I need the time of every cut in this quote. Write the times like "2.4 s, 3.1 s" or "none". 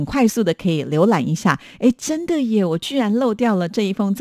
none